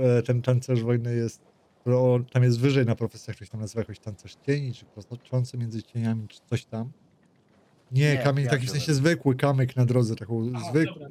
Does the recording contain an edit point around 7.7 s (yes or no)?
yes